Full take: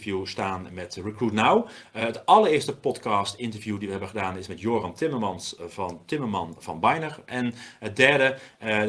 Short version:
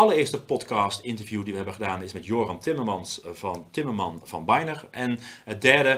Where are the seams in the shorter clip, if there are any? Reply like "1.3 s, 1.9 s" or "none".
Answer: none